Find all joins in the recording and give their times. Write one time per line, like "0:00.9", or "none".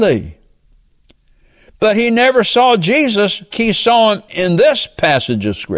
0:03.5